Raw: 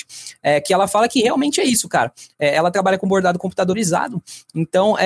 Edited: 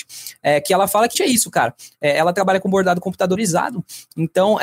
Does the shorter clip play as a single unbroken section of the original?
no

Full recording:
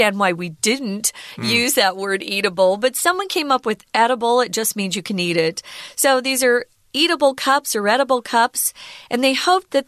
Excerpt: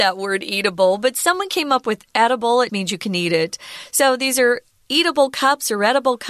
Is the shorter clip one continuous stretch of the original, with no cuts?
no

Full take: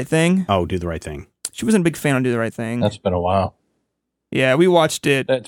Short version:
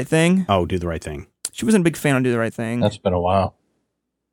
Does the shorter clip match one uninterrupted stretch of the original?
yes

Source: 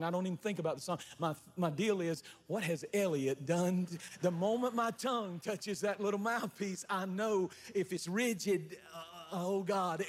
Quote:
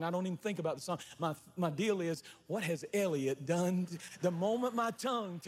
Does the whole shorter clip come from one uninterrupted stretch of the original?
yes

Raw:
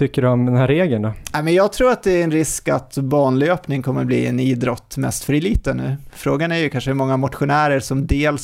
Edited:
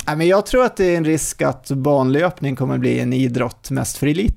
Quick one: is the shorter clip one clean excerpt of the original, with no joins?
yes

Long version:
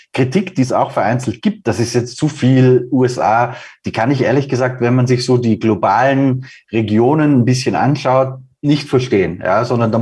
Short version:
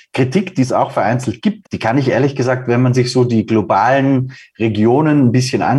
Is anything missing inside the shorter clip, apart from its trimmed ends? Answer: yes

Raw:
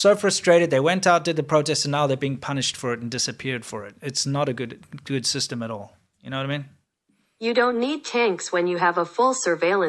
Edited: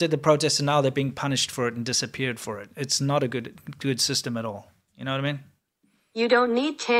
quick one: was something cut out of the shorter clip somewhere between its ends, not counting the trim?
no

